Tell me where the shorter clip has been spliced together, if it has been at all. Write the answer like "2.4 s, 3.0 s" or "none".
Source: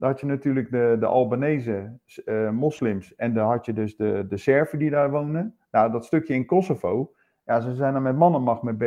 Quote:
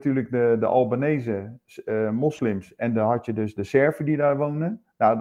3.6 s